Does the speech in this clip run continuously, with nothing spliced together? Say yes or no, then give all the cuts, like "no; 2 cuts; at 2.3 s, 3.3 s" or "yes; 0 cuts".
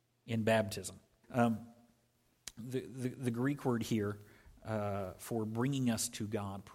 no; 1 cut; at 1.2 s